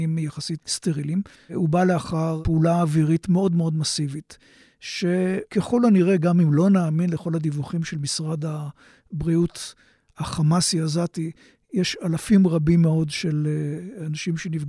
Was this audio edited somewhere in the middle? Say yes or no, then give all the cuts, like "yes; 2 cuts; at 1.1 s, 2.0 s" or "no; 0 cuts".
yes; 1 cut; at 1.3 s